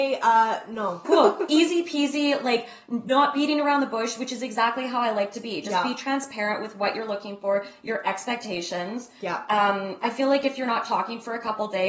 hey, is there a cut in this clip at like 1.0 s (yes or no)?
yes